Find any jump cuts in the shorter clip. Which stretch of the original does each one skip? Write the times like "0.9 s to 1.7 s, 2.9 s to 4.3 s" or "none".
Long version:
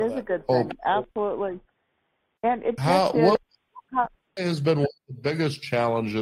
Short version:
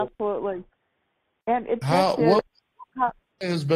none